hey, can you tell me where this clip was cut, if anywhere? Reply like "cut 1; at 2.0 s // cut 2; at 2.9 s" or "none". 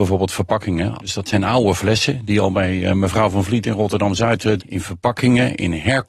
cut 1; at 1.0 s // cut 2; at 4.6 s